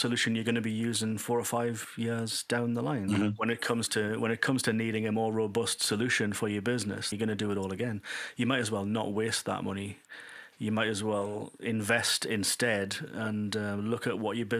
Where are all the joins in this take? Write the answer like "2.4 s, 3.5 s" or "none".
7.1 s